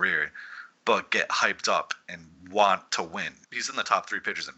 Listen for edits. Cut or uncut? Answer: cut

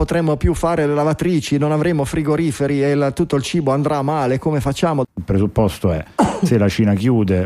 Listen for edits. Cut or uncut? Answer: cut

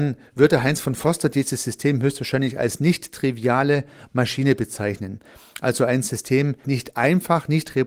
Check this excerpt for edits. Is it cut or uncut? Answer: cut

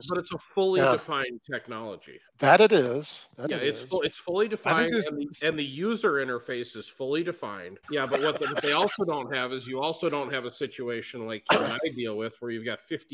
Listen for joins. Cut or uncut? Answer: cut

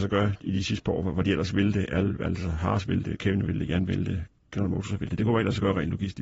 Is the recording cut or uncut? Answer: uncut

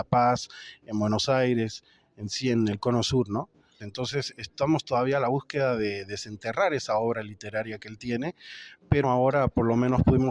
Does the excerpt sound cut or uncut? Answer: cut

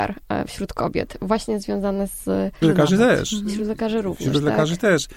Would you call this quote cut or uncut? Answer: cut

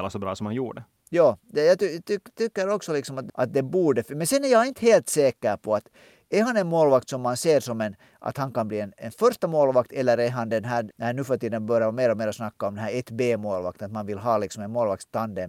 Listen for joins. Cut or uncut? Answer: uncut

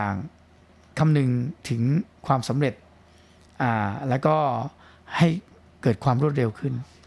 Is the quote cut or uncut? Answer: cut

